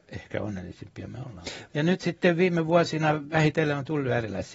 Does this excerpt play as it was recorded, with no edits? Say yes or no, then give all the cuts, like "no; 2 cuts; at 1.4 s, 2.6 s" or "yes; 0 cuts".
no; 1 cut; at 1.7 s